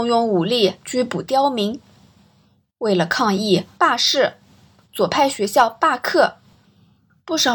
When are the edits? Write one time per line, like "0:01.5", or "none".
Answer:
0:03.8

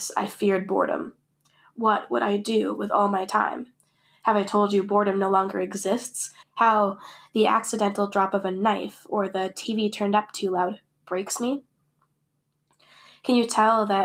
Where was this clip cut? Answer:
0:06.4

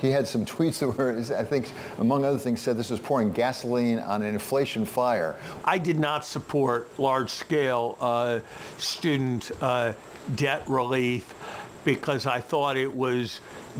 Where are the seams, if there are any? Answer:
0:05.6

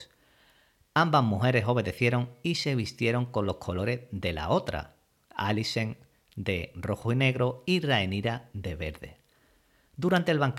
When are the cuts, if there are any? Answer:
none

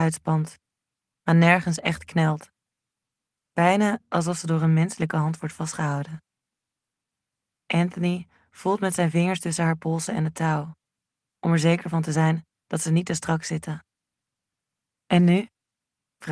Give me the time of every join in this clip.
0:03.4

